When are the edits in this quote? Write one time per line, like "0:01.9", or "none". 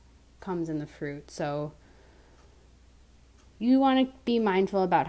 none